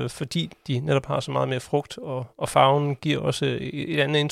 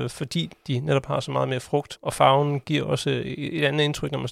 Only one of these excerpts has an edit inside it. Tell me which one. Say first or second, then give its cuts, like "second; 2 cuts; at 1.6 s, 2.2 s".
second; 1 cut; at 2.0 s